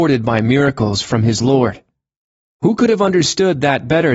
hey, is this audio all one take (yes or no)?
yes